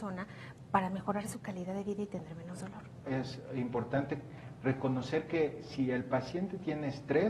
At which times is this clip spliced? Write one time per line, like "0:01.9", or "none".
0:03.1